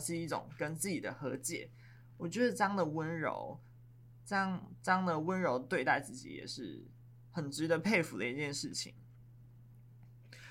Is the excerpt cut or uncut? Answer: uncut